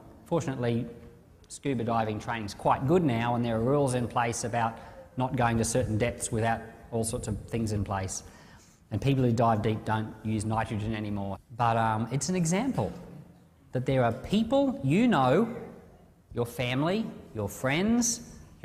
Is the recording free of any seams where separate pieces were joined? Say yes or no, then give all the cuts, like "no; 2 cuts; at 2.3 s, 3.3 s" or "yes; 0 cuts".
no; 1 cut; at 11.4 s